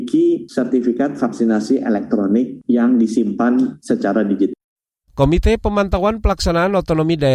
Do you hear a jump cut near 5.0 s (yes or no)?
yes